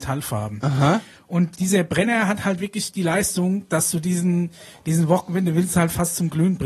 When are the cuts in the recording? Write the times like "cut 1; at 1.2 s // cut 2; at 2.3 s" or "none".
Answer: cut 1; at 1.5 s